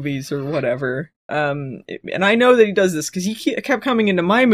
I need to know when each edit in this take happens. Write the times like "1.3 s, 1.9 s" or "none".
none